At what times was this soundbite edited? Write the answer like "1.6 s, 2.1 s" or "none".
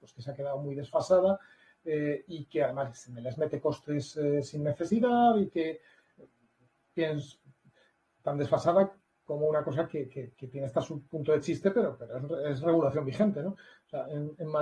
none